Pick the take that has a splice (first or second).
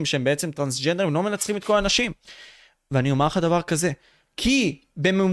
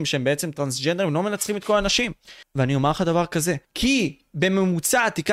second